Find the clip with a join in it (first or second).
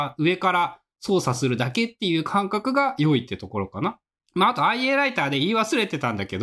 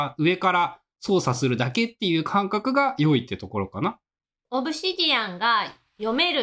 first